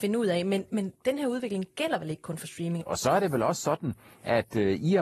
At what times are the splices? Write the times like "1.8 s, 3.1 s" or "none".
2.8 s